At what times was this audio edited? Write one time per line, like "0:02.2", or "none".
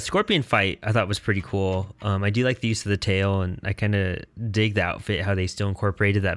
none